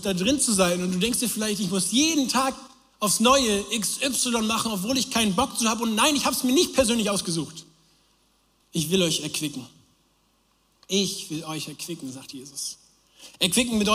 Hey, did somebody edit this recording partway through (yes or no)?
yes